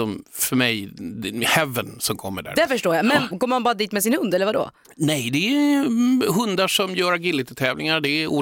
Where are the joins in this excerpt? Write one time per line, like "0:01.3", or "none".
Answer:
0:03.3